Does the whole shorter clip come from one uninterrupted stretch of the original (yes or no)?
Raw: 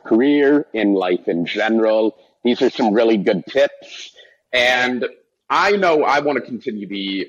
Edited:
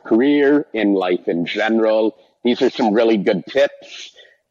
yes